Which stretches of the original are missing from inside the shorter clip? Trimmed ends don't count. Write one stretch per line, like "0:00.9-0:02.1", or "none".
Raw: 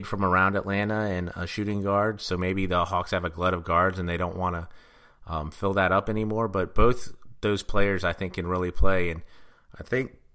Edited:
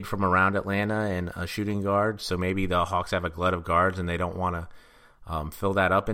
none